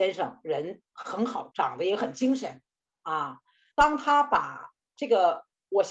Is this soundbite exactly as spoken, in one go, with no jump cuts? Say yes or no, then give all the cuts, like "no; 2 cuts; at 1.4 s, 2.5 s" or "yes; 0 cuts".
no; 2 cuts; at 1.5 s, 3.7 s